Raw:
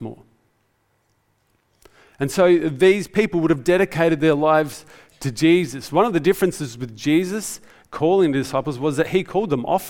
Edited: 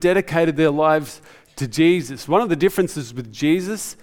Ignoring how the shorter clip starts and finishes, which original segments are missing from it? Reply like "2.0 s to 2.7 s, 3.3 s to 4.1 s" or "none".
none